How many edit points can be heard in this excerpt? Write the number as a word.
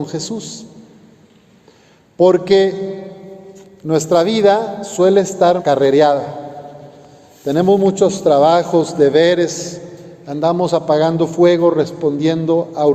one